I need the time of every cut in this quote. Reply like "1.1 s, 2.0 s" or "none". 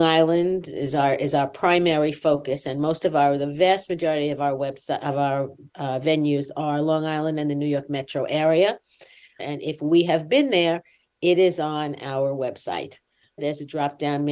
9.4 s, 13.4 s